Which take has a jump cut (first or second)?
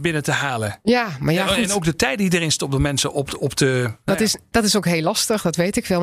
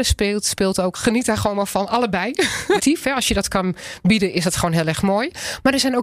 second